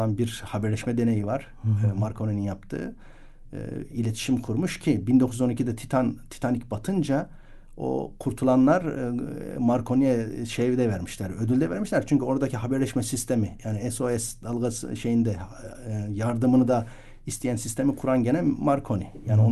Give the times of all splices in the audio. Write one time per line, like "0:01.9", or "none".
0:03.9